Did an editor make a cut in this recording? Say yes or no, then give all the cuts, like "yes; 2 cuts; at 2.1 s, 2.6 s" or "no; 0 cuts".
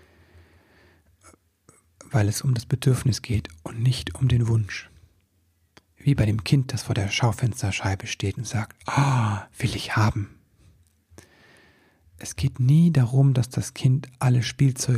no; 0 cuts